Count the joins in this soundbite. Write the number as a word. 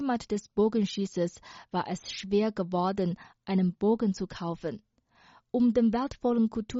zero